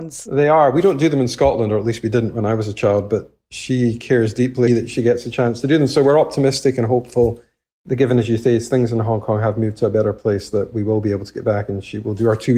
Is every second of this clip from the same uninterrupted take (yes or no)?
no